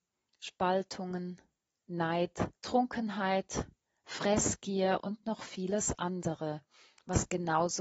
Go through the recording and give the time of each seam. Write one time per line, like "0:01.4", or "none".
0:02.6

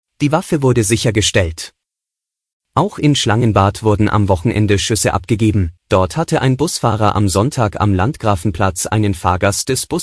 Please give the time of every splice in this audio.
0:05.8

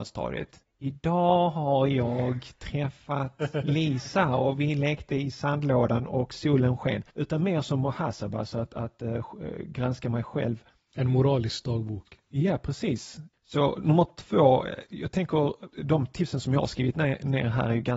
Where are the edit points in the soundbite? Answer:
0:07.1
0:13.3
0:15.7

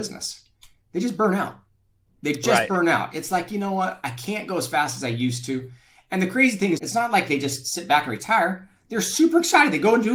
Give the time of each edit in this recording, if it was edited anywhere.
0:06.8

